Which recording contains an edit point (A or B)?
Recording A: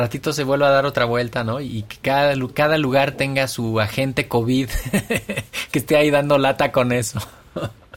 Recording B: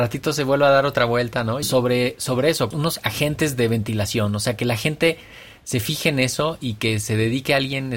B